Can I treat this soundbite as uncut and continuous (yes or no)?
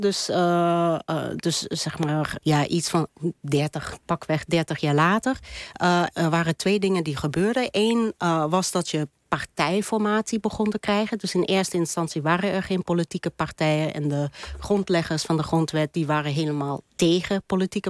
no